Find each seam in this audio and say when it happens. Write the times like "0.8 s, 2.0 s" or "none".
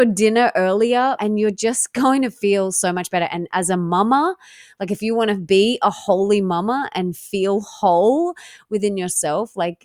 1.2 s